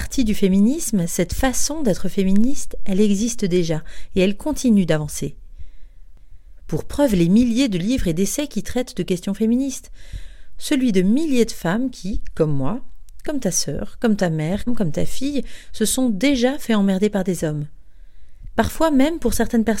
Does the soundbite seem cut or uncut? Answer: cut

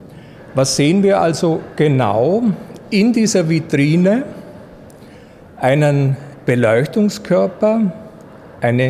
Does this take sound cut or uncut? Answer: uncut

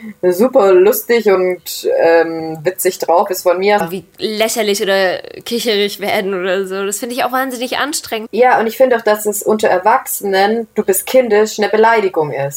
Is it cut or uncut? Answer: cut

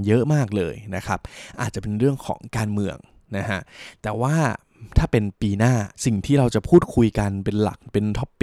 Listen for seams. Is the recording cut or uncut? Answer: cut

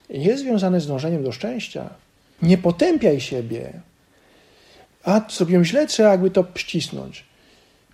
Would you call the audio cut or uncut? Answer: cut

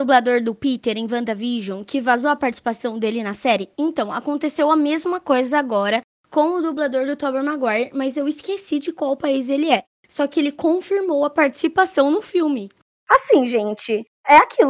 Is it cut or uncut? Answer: uncut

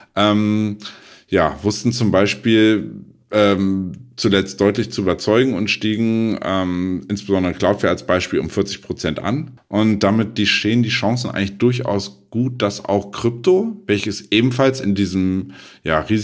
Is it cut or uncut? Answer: cut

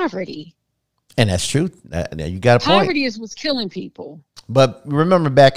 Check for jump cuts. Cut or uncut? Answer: uncut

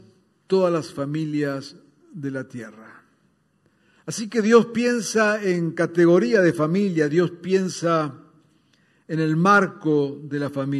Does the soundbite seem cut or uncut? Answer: uncut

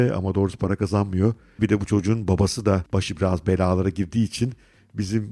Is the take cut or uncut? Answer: cut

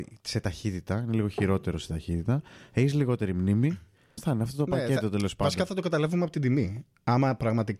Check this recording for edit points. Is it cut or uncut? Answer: cut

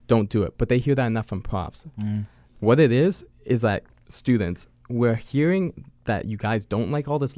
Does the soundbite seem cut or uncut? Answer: uncut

